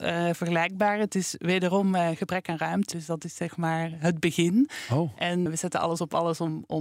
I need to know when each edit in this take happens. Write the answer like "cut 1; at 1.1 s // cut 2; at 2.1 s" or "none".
cut 1; at 2.9 s // cut 2; at 5.5 s